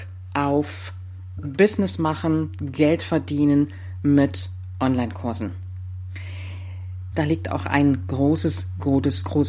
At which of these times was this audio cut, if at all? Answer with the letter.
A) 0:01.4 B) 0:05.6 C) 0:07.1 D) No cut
C